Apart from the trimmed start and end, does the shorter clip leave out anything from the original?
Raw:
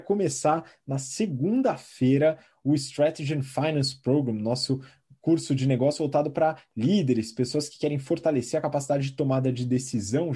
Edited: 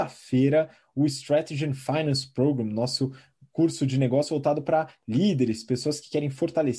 no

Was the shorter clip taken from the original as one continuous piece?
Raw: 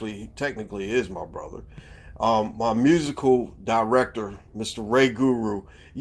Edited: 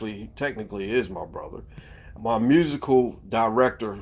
no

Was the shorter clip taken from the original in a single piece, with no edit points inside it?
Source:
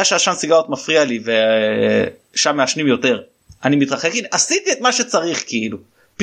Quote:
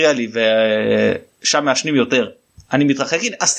yes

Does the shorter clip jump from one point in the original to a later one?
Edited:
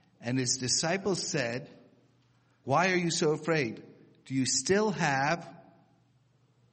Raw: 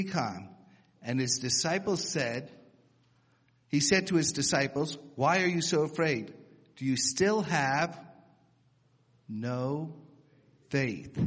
yes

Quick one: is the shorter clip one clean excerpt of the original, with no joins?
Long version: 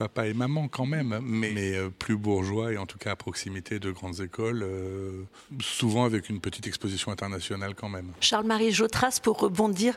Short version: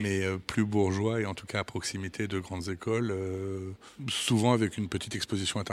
yes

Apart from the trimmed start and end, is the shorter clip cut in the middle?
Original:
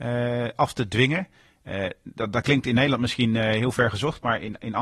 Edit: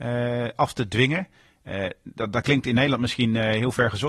no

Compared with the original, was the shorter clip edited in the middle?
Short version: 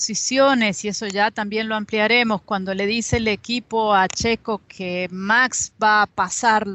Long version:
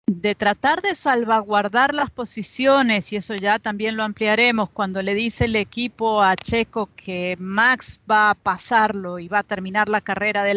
no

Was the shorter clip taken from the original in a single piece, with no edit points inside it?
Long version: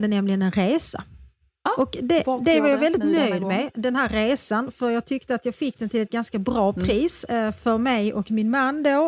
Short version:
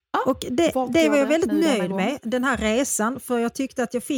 yes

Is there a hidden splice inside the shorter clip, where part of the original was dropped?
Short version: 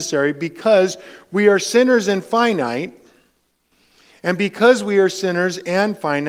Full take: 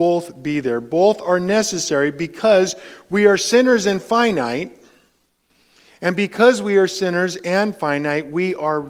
no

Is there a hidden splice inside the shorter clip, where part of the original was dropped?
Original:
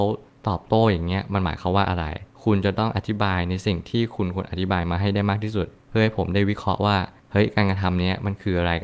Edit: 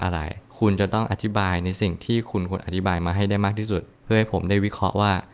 no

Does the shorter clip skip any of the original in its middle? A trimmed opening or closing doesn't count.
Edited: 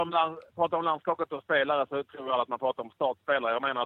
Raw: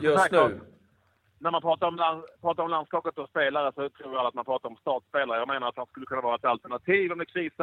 no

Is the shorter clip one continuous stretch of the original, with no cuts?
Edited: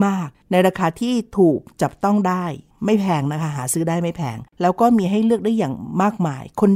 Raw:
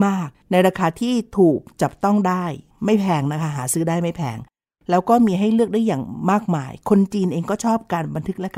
no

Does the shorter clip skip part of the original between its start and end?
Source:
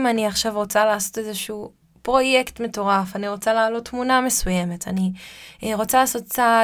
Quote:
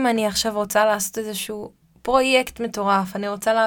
no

